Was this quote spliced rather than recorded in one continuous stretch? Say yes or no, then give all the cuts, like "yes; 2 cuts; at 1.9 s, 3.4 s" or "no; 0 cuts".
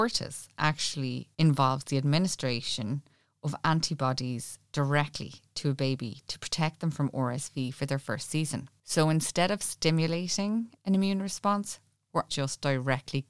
yes; 1 cut; at 12.3 s